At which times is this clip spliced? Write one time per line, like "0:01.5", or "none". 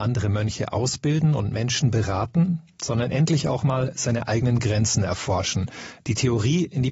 none